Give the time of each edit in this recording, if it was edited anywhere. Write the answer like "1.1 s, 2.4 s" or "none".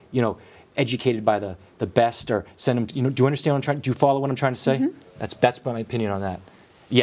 none